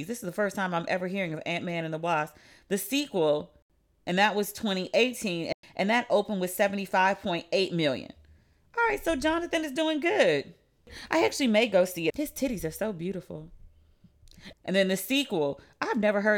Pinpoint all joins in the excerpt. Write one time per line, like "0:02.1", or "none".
0:12.1
0:14.5